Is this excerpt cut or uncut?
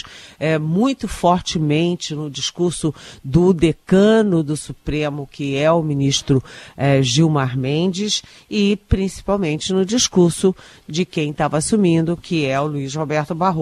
uncut